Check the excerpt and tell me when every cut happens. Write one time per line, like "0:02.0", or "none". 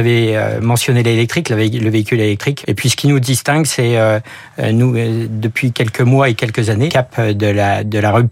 0:02.6
0:05.7
0:06.9